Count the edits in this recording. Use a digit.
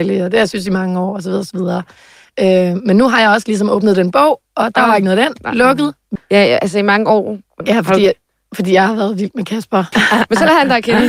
3